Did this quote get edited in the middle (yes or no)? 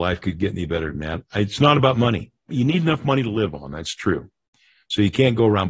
yes